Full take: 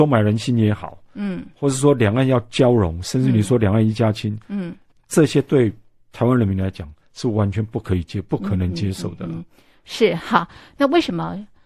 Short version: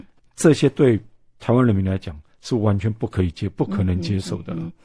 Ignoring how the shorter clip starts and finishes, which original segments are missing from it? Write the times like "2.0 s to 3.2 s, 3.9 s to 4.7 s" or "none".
none